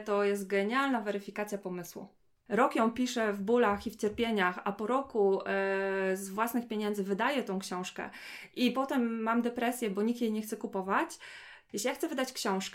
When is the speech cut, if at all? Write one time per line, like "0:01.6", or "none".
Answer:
0:02.5
0:11.7